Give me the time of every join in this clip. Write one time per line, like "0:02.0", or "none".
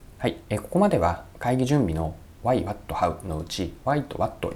none